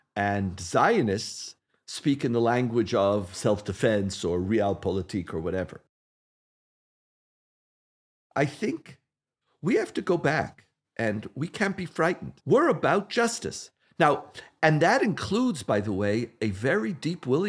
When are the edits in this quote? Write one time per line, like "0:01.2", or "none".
none